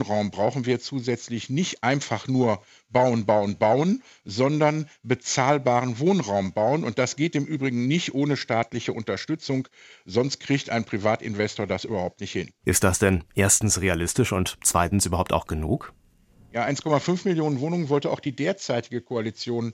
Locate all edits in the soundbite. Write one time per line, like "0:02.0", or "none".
0:12.6